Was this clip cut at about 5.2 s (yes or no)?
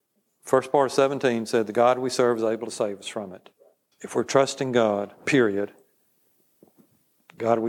yes